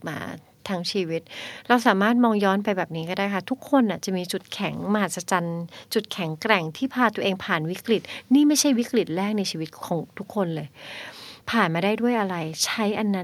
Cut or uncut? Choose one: cut